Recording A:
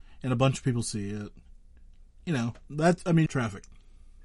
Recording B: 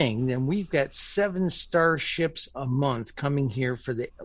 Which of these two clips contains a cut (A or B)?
A